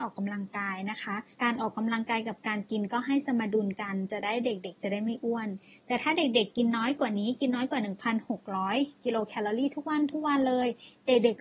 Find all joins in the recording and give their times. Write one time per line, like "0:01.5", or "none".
0:01.3